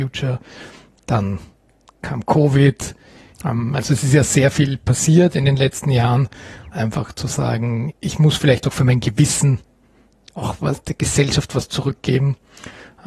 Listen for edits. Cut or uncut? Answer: cut